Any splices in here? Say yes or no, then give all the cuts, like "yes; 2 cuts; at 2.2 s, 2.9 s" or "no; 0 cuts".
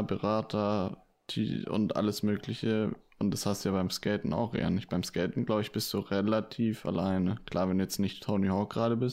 no; 0 cuts